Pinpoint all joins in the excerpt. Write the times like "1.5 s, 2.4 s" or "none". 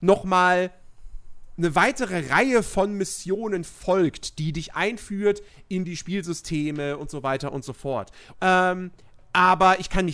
8.3 s